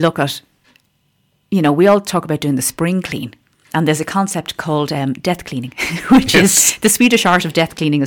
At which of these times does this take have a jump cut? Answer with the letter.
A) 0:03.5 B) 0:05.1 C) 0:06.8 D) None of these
D